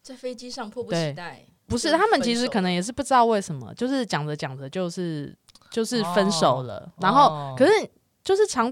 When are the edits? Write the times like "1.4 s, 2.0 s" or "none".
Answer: 1.6 s

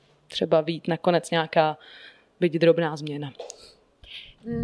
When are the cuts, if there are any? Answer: none

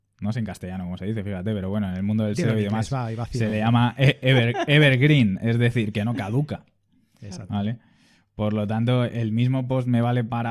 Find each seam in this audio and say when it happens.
none

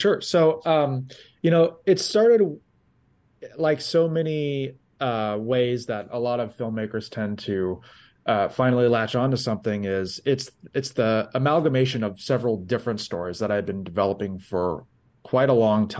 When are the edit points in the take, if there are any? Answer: none

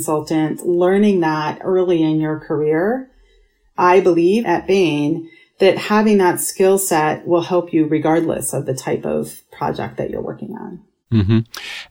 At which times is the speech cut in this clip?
4.4 s

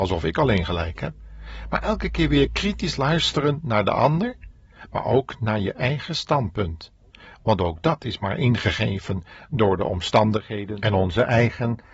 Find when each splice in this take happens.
none

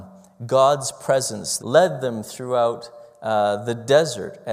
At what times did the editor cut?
1.6 s

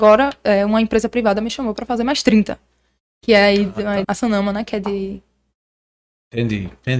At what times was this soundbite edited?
4.0 s

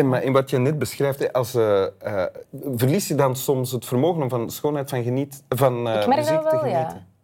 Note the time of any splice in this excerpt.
none

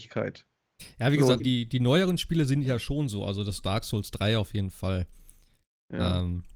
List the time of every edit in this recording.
1.4 s

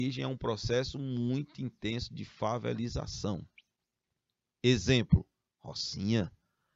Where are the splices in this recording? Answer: none

